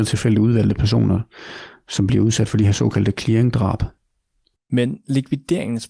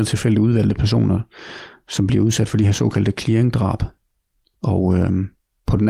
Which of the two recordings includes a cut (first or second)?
first